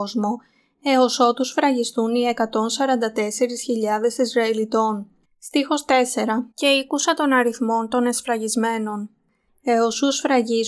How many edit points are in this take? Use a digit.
3